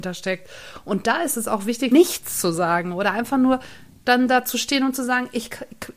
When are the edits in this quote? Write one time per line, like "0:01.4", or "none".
0:01.9